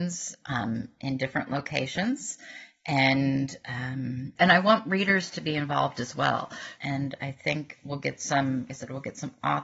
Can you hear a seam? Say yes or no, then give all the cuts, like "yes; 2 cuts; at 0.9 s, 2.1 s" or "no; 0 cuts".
yes; 3 cuts; at 4.4 s, 6.7 s, 8.7 s